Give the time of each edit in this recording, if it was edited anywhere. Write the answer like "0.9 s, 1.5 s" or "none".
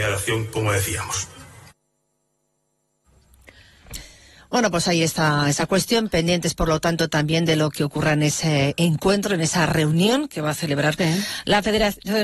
11.0 s